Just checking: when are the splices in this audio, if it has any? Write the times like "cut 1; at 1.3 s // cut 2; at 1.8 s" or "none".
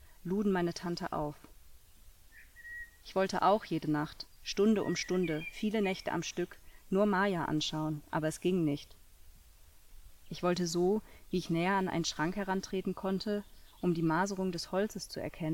cut 1; at 3.0 s // cut 2; at 10.2 s